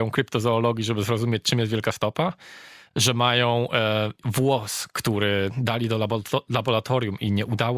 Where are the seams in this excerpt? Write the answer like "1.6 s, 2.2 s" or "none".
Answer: none